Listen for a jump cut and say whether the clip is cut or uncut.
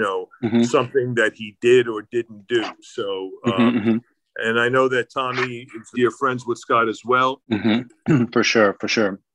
cut